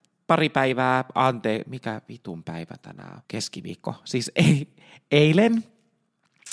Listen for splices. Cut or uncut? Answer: cut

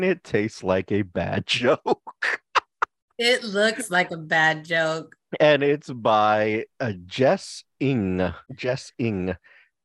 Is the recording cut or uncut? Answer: cut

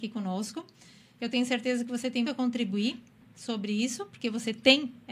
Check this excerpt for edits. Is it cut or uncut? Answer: cut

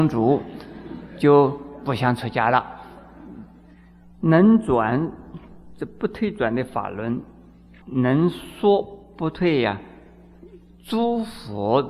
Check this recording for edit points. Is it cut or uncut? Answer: cut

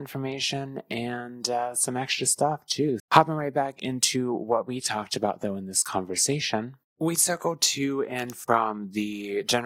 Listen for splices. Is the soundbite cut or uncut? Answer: cut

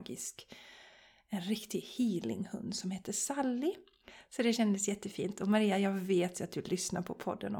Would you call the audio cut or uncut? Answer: uncut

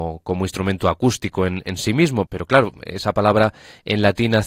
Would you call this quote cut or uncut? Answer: cut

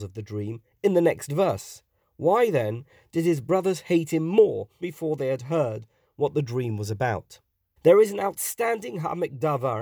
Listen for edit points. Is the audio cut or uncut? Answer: cut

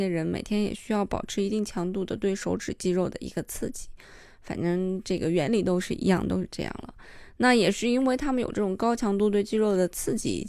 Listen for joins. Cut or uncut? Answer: uncut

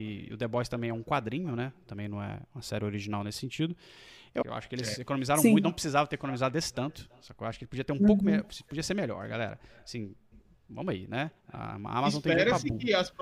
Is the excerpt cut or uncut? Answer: cut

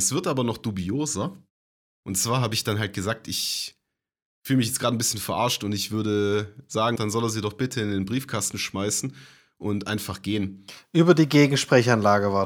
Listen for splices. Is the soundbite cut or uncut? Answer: cut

